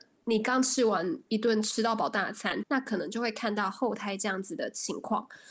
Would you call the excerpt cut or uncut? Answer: cut